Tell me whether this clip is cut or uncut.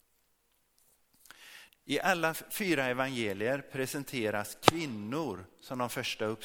cut